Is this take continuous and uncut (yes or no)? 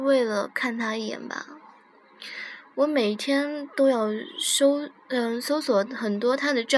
yes